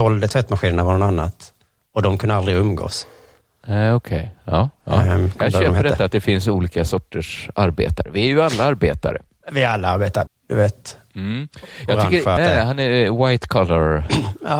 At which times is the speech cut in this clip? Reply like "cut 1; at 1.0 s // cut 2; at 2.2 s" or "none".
cut 1; at 10.3 s // cut 2; at 12.4 s